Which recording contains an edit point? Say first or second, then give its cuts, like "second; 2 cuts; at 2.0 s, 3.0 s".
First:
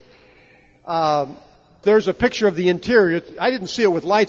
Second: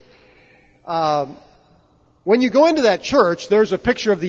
first; 1 cut; at 1.8 s